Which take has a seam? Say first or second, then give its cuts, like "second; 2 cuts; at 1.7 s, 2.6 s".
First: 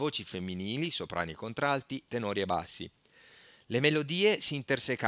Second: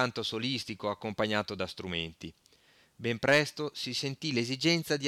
first; 1 cut; at 2.1 s